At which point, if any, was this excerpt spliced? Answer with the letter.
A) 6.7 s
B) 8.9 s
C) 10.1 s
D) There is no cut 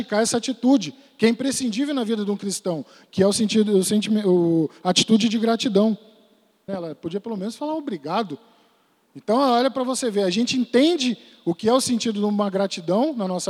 A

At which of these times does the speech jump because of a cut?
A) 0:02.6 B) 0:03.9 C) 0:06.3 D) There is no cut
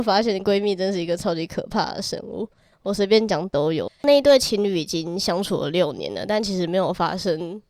B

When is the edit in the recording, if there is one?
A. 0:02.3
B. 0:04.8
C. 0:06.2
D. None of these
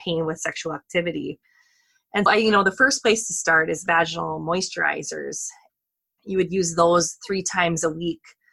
A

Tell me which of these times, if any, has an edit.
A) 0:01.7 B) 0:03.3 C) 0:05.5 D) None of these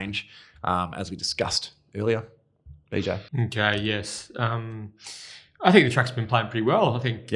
B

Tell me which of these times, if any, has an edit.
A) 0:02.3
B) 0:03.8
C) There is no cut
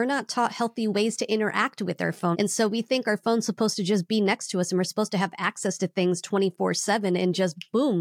A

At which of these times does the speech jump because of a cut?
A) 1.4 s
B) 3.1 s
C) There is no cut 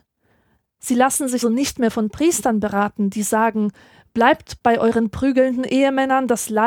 A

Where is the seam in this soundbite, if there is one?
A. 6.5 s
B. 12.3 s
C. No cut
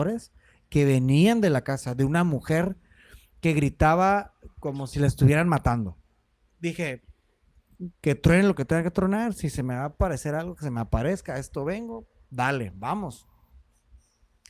A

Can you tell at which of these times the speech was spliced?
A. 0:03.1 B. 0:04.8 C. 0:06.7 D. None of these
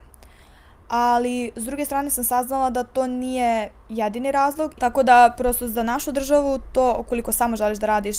B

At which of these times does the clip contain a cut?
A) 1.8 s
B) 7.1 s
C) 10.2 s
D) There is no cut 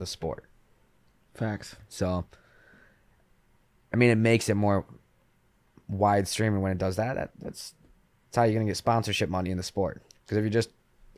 C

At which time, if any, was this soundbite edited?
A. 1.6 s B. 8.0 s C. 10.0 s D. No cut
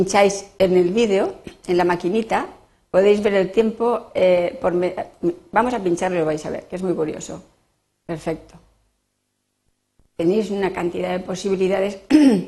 B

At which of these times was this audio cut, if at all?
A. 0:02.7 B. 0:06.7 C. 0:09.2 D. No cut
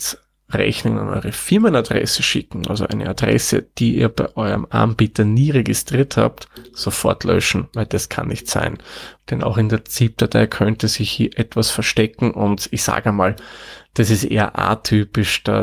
C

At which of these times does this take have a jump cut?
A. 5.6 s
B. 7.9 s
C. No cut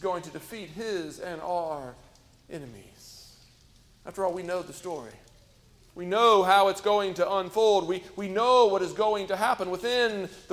C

